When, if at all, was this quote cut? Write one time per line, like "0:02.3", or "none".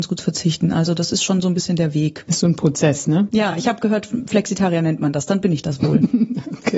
none